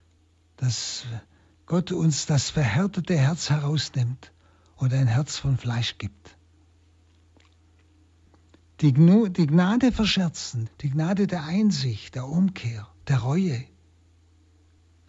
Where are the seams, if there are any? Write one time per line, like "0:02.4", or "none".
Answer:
0:10.7
0:13.0